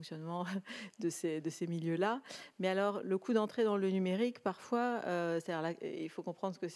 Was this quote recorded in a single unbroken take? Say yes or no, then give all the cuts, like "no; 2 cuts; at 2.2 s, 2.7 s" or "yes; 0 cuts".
yes; 0 cuts